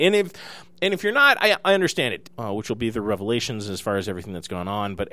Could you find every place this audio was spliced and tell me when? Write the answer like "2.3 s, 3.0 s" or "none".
2.2 s